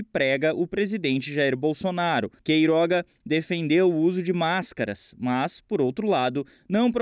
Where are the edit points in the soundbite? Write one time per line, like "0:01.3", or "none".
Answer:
0:02.4